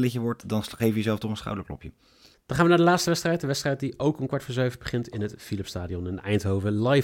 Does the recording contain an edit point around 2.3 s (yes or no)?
yes